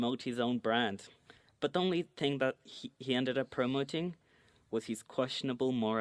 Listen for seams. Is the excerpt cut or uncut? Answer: uncut